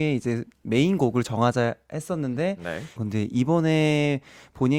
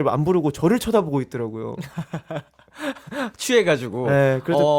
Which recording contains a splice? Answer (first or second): first